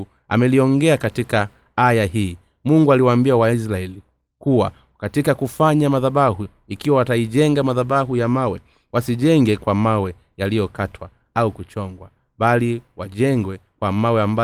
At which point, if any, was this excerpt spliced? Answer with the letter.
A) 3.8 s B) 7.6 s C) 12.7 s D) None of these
D